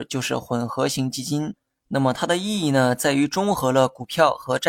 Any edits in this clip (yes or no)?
no